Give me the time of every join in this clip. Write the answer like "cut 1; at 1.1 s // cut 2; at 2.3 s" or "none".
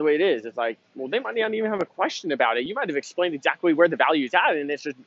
none